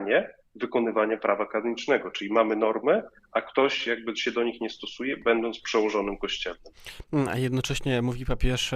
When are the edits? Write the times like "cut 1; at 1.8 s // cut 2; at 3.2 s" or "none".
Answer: none